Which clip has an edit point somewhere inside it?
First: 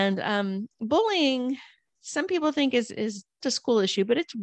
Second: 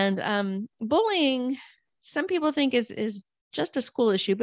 first; 1 cut; at 3.4 s

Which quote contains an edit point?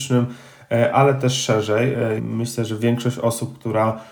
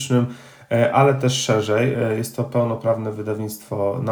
first; 1 cut; at 2.2 s

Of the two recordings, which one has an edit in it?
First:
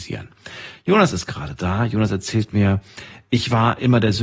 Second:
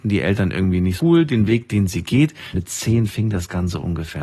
second; 2 cuts; at 1.0 s, 2.5 s

